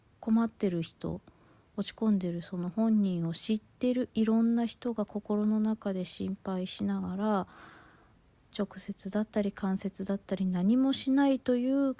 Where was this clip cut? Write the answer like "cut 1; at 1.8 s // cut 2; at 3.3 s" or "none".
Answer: none